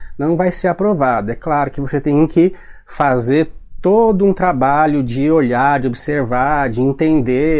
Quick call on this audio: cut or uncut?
uncut